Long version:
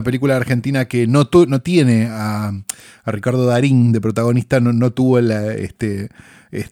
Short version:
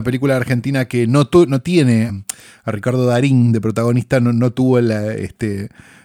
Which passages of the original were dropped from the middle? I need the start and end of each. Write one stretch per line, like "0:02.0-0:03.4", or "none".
0:02.1-0:02.5